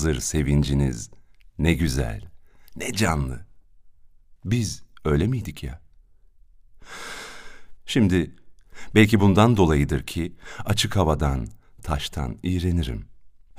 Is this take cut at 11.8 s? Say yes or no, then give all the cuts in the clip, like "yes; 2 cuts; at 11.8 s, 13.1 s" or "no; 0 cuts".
yes; 2 cuts; at 7.8 s, 11.8 s